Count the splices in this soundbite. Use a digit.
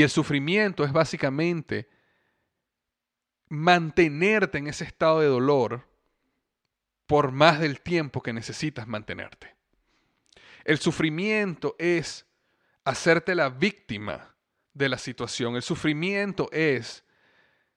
0